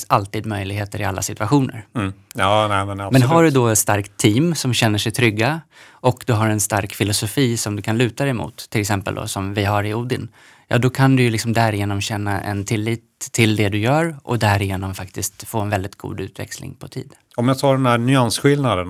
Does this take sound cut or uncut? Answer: cut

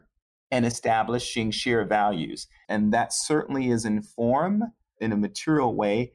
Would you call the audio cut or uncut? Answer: cut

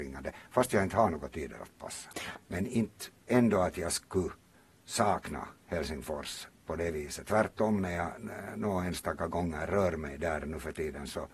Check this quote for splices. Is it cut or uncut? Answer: cut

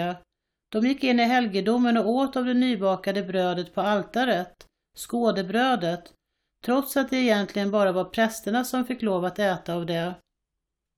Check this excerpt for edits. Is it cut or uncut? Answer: uncut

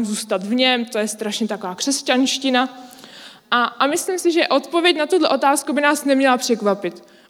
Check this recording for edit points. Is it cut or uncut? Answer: uncut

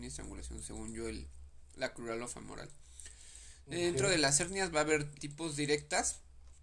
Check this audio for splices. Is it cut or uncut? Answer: cut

